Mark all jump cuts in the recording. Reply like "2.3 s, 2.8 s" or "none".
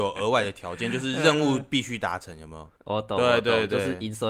none